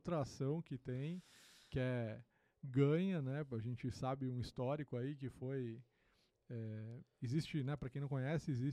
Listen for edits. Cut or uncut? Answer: uncut